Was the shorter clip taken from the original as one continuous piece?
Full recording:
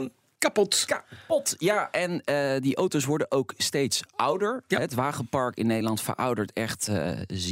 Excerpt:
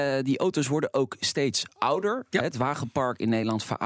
yes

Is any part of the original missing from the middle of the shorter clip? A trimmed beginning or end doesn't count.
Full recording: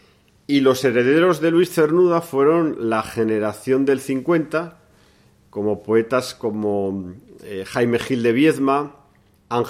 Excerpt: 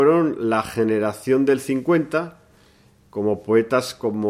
no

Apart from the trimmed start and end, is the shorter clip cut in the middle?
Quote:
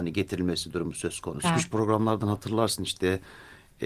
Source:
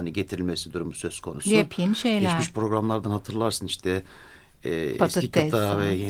yes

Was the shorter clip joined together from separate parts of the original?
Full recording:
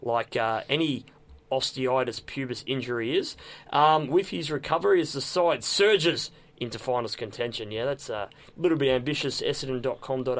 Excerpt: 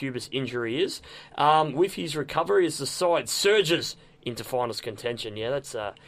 no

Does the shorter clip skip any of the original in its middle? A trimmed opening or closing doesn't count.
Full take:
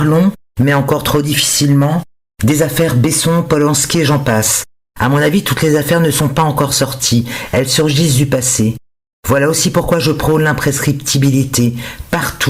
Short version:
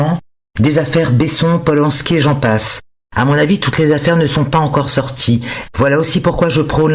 yes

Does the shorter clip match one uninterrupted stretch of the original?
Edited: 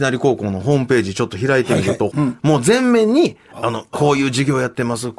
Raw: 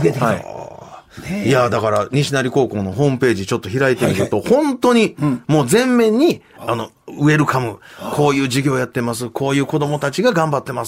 no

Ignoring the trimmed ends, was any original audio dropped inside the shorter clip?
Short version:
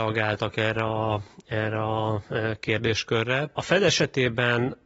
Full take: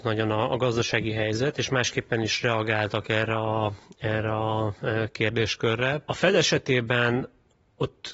no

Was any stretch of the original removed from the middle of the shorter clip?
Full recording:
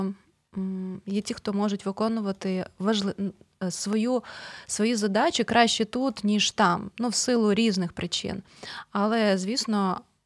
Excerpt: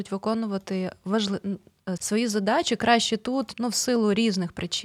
yes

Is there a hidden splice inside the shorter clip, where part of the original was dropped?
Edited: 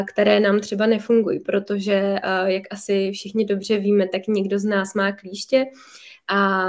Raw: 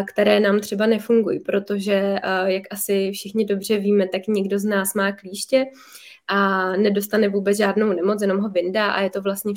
no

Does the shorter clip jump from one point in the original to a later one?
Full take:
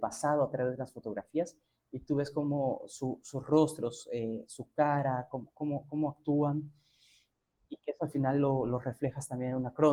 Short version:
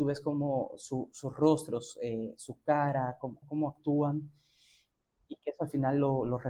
yes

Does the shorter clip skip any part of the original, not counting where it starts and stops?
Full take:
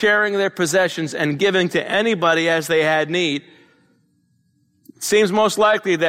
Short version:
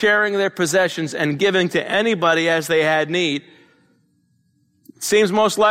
no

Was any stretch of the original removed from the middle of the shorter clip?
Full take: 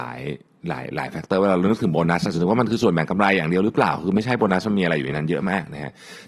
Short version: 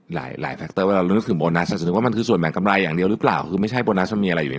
no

